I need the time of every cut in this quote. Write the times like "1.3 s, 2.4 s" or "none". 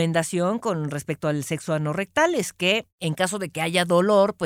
none

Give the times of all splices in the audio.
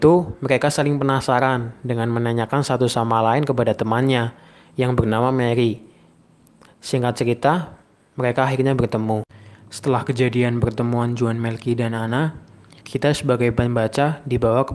12.8 s

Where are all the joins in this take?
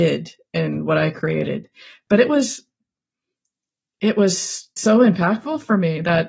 4.8 s

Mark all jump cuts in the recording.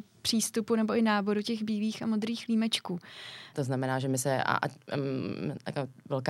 3.5 s

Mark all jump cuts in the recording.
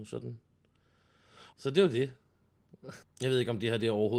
1.5 s, 3.0 s

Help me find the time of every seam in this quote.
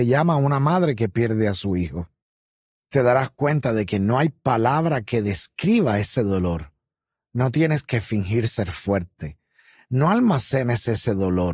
none

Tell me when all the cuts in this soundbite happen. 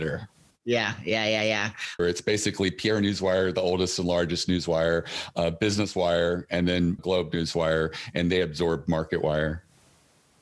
2.0 s, 7.0 s

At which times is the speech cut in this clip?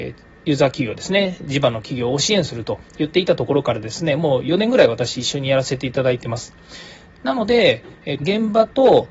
7.1 s, 8.2 s

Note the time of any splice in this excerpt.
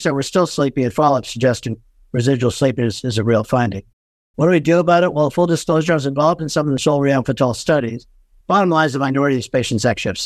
8.4 s

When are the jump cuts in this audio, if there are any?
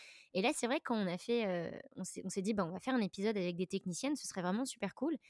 none

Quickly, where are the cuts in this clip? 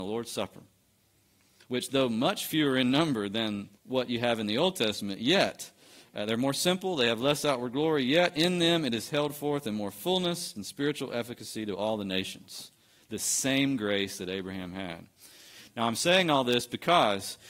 3.8 s, 10.6 s

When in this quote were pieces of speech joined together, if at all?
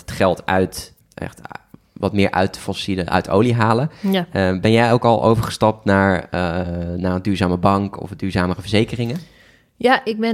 1.0 s

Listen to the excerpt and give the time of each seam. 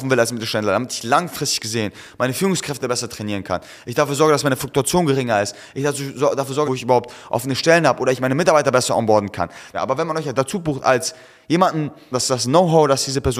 6.6 s, 9.7 s, 12.1 s

